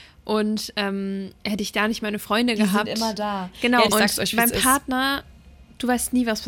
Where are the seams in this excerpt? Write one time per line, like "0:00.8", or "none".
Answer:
0:03.9